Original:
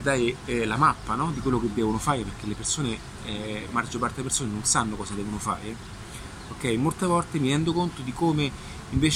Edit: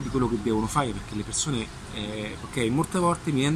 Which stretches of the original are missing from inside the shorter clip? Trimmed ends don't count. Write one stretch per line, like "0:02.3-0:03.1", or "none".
0:03.7-0:06.4